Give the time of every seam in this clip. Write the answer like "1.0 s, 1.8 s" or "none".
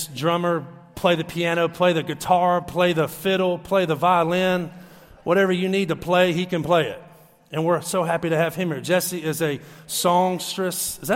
none